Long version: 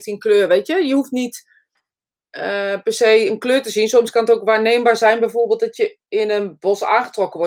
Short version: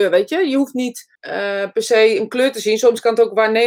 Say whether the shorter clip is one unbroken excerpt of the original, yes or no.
no